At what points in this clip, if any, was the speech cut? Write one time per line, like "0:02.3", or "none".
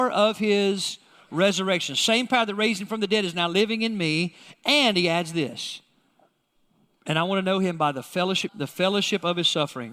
0:08.5